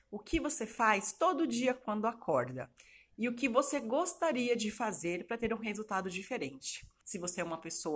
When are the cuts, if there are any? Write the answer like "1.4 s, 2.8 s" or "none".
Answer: 7.0 s